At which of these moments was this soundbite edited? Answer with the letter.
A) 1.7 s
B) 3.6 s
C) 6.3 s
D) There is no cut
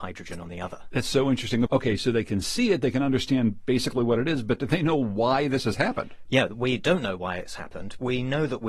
A